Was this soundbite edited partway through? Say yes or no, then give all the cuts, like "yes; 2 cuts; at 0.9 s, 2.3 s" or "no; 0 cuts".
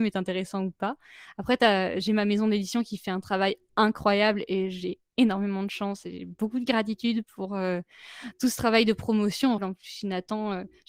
yes; 1 cut; at 9.6 s